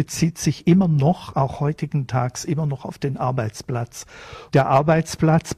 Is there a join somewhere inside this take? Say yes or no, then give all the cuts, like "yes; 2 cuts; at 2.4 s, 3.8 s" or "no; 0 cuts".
yes; 1 cut; at 4.5 s